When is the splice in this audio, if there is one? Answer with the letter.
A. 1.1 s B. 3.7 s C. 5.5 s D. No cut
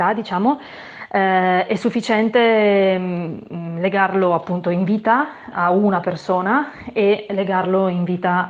C